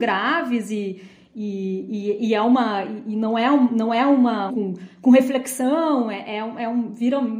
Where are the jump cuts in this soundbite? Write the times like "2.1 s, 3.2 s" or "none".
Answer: 4.5 s